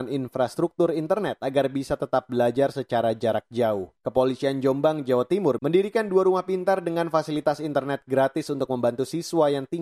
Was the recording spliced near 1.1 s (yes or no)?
no